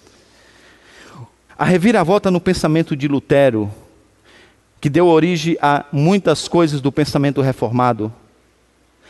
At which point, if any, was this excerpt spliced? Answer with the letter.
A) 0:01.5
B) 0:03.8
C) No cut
A